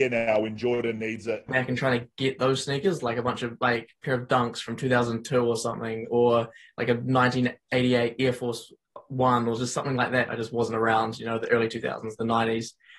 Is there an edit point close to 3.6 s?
no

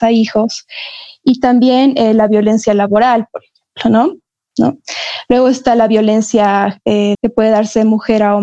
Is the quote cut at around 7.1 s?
yes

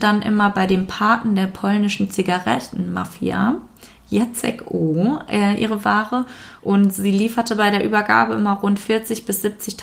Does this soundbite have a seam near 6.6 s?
yes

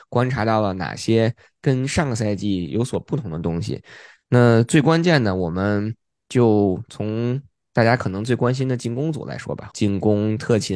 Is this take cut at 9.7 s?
yes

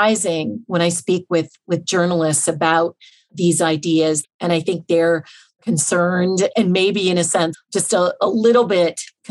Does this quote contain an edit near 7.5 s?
yes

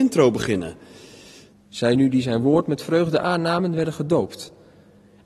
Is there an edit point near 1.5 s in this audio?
yes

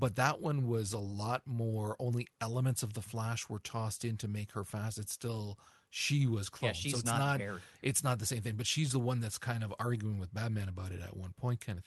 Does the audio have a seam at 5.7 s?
no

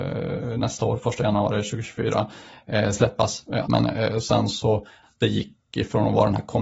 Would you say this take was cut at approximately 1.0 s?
no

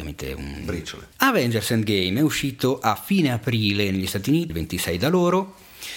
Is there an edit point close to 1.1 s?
yes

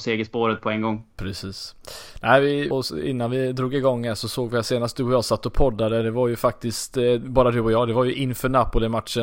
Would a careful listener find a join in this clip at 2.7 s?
yes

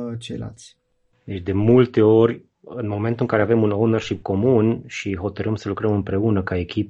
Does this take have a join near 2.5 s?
no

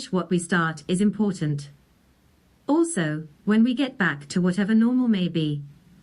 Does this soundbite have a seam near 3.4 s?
no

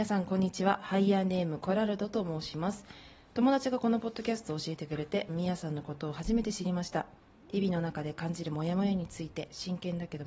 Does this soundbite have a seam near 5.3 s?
yes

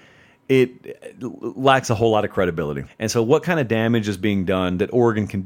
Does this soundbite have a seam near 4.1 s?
no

